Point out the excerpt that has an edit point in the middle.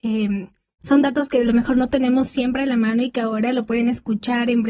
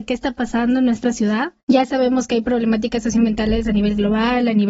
second; 1 cut; at 1.6 s

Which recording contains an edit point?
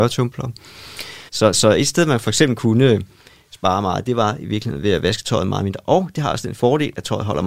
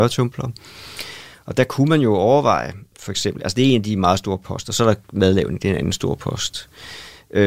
first; 1 cut; at 1.3 s

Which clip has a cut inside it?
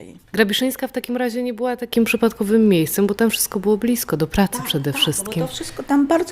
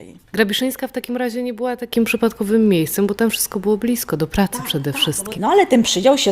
second; 1 cut; at 5.3 s

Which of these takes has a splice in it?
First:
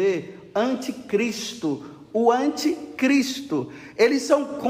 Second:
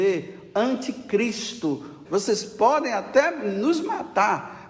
second; 1 cut; at 2.1 s

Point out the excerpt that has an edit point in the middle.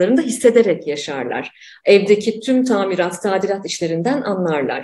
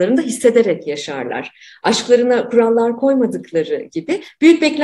first; 1 cut; at 1.8 s

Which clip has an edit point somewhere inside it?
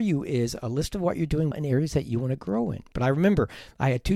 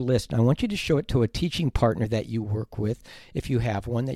first; 2 cuts; at 1.5 s, 2.9 s

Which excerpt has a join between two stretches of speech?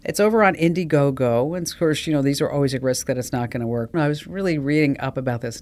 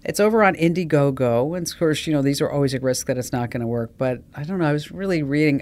first; 1 cut; at 3.9 s

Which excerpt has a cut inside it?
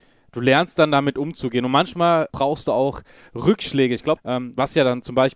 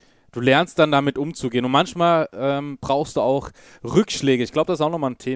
first; 2 cuts; at 2.3 s, 4.2 s

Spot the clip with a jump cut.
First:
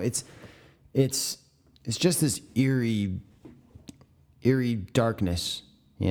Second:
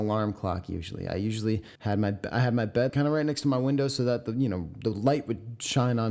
second; 2 cuts; at 1.8 s, 2.9 s

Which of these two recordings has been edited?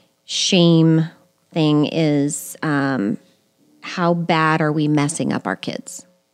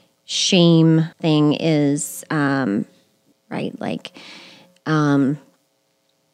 second; 2 cuts; at 1.1 s, 3.3 s

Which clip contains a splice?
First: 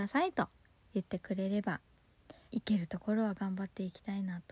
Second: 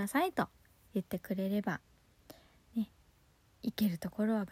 first; 1 cut; at 2.5 s

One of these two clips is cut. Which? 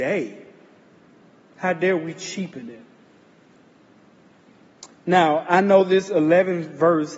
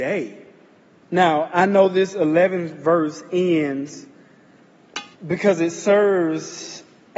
second; 2 cuts; at 1.0 s, 5.1 s

